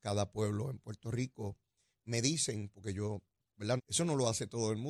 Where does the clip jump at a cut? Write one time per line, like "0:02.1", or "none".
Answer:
0:03.8